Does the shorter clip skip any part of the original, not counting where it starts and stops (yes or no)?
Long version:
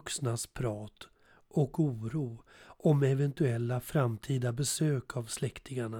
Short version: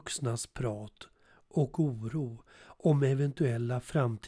no